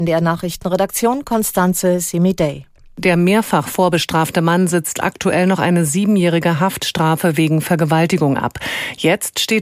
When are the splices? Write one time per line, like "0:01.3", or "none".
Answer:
none